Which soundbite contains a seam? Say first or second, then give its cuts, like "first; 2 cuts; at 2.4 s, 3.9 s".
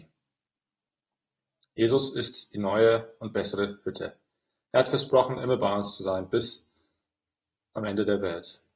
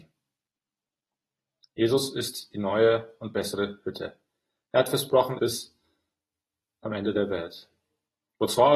second; 1 cut; at 5.4 s